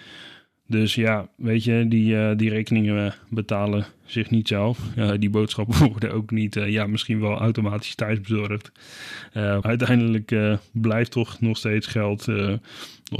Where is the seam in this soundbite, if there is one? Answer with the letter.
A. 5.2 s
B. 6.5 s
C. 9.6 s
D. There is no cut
C